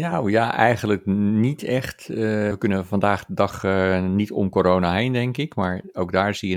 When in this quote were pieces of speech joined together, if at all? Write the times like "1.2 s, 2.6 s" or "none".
2.5 s